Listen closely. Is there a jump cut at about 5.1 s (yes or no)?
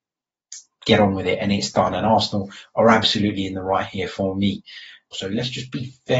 yes